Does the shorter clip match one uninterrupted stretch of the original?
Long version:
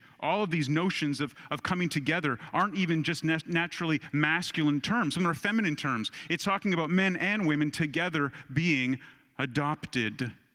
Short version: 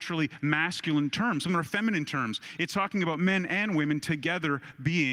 yes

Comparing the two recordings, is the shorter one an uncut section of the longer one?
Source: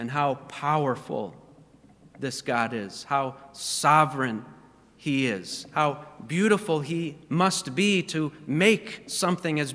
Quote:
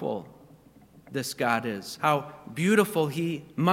no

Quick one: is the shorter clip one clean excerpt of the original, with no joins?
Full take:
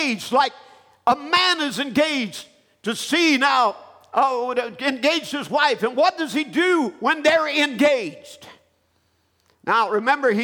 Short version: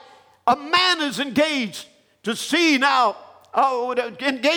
yes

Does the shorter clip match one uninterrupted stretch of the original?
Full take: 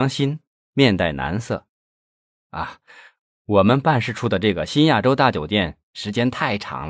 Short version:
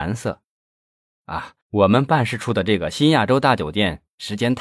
no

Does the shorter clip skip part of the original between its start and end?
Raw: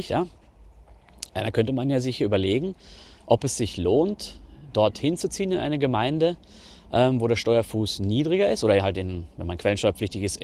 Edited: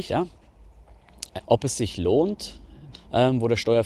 yes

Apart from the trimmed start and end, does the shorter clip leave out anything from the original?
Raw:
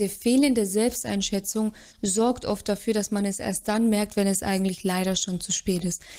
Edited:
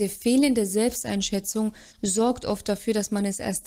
no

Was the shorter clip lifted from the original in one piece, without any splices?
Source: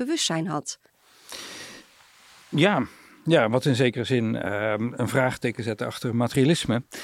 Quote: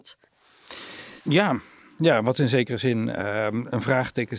no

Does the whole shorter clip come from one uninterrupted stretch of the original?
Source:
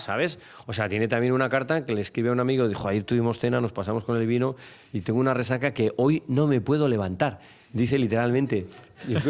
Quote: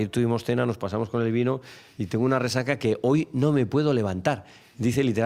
yes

